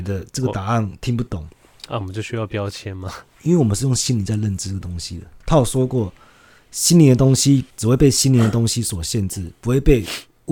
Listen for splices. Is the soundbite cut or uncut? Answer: uncut